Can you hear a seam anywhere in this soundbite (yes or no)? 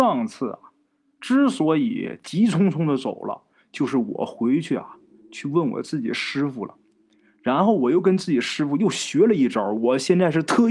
no